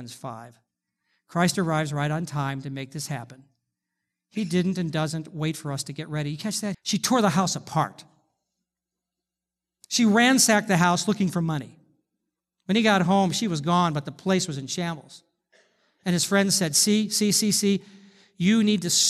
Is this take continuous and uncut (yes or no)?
no